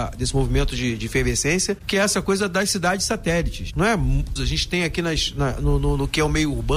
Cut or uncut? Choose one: cut